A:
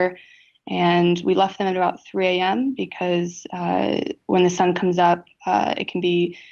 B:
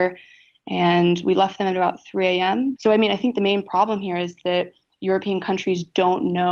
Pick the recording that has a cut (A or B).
B